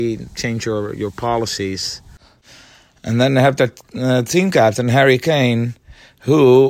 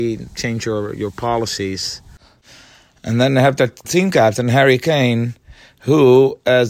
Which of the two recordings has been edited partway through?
second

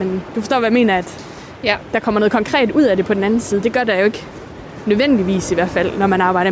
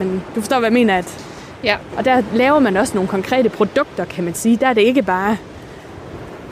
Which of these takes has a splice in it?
second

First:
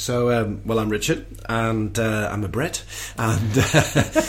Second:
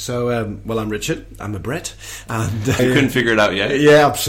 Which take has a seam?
second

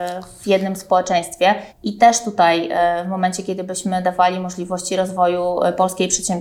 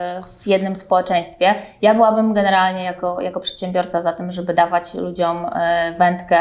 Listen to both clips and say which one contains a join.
first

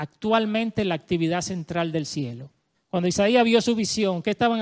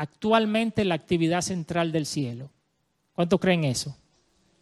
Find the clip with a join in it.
first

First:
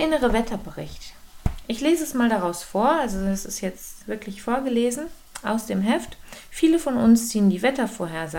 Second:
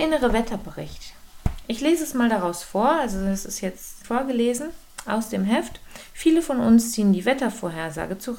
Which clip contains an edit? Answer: second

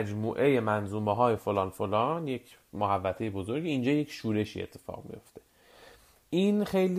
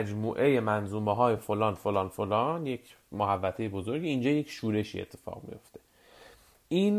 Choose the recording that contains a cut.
first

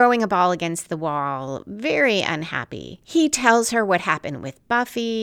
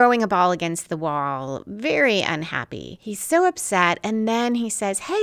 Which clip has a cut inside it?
second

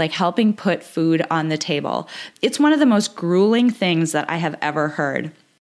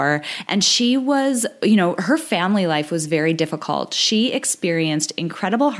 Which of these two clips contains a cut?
first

